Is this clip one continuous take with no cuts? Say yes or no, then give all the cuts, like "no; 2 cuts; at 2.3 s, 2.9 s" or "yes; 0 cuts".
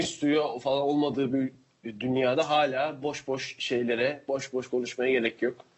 yes; 0 cuts